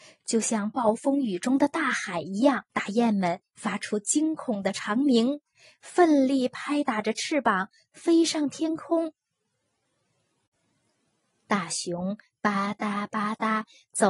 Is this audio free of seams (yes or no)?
no